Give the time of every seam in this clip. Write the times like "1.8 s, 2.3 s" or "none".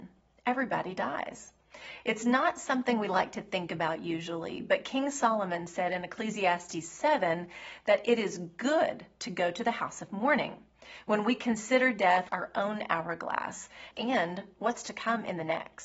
12.3 s, 13.9 s